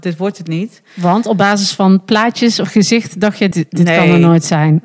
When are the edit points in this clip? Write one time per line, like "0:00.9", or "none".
0:03.5